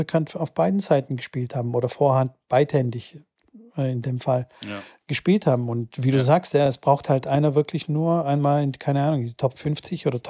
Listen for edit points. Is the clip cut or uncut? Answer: uncut